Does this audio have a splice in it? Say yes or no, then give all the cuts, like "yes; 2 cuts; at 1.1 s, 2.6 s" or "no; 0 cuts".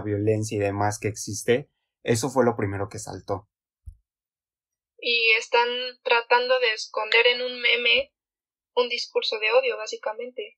no; 0 cuts